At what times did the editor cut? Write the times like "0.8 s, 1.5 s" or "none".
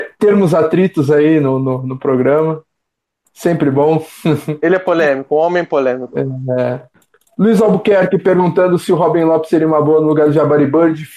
none